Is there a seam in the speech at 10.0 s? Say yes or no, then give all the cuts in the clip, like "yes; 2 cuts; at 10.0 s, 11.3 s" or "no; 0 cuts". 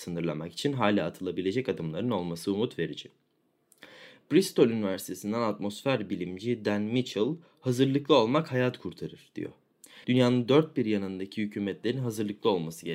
yes; 1 cut; at 10.0 s